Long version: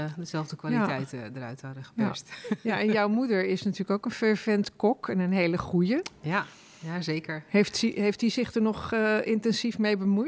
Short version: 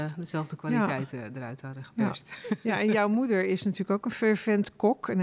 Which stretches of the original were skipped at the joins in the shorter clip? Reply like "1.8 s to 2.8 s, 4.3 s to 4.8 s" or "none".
none